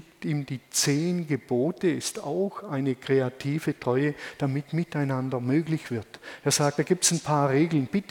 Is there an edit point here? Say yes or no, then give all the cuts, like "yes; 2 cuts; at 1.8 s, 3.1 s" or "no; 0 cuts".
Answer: no; 0 cuts